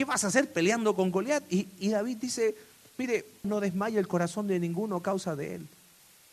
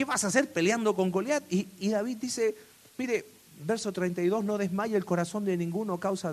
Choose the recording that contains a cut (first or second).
first